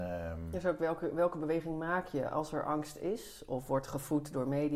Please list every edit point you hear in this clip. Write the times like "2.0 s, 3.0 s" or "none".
none